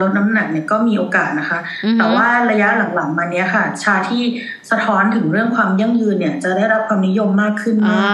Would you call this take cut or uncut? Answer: uncut